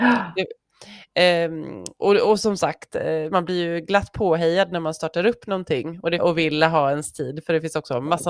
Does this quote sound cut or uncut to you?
cut